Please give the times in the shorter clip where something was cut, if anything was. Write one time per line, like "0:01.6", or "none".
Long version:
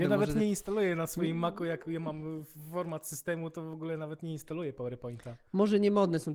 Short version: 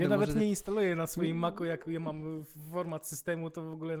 none